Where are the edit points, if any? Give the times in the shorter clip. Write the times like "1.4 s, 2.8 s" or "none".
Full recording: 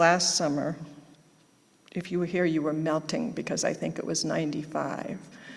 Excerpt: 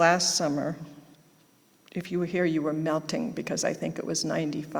none